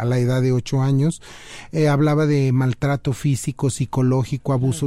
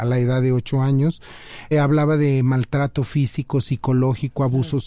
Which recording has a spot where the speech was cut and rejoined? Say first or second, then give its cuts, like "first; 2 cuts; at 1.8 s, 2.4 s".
second; 1 cut; at 1.7 s